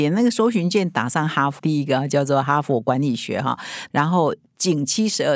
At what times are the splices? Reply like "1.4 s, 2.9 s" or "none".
1.6 s, 3.9 s

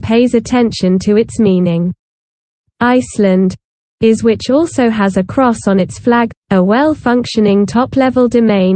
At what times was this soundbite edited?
2.6 s, 6.3 s

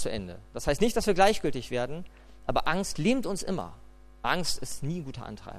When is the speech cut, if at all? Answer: none

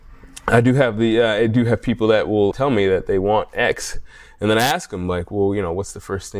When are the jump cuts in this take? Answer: 2.5 s

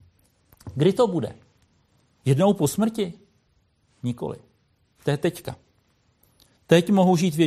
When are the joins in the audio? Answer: none

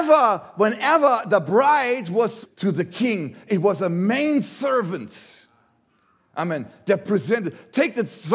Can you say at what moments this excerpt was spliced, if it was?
2.4 s

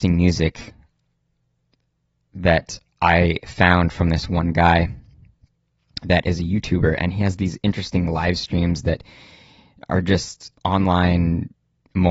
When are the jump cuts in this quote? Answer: 10.6 s

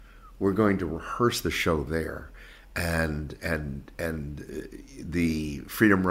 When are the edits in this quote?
none

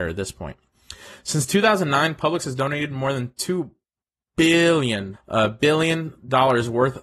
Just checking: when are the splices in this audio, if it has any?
5.1 s

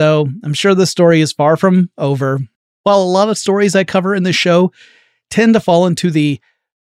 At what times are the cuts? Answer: 2.6 s

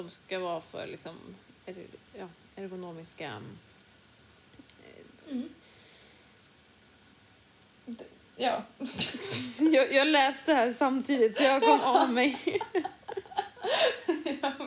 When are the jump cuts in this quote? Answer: none

